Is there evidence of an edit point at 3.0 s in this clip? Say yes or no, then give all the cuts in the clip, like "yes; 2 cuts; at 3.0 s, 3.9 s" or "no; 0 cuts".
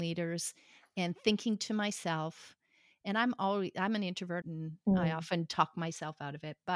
no; 1 cut; at 4.4 s